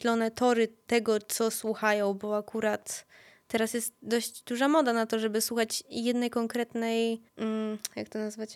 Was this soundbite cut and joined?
yes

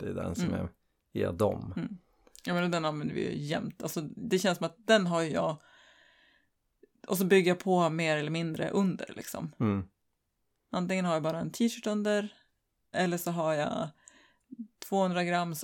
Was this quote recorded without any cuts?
no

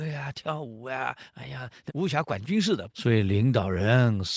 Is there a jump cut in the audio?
yes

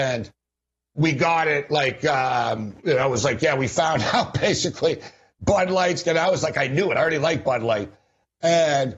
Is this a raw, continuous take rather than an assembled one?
yes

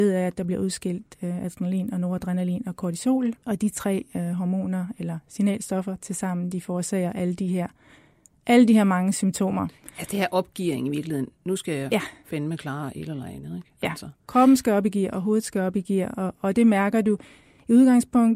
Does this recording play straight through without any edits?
yes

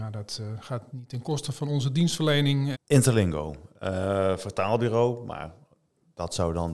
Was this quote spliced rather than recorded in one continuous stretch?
yes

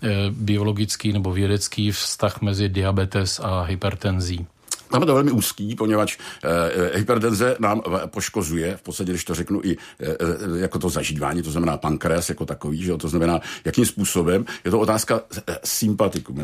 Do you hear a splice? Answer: no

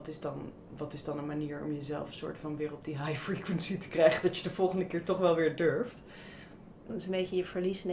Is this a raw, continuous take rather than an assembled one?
no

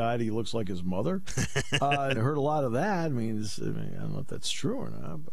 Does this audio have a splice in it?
yes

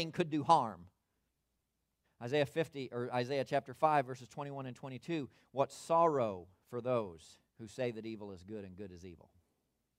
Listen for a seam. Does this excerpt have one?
yes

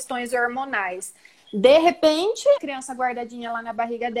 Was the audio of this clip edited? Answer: yes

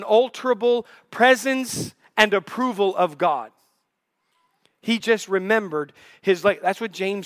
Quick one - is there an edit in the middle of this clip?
no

